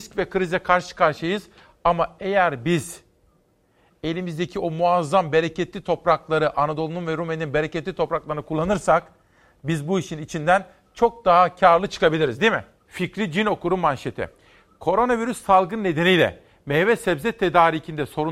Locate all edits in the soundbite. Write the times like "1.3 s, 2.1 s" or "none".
12.9 s